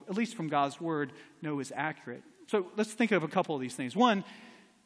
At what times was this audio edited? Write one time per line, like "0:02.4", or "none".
none